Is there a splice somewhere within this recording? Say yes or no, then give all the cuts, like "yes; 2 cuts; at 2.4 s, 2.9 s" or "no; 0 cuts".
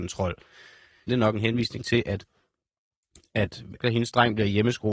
yes; 2 cuts; at 1.1 s, 3.8 s